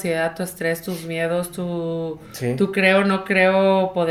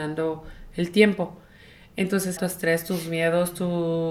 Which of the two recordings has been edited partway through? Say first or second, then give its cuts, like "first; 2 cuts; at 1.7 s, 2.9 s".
second; 1 cut; at 2.4 s